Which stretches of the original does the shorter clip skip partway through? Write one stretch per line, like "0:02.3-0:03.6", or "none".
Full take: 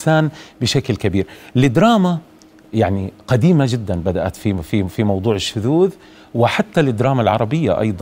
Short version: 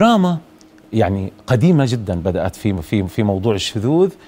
none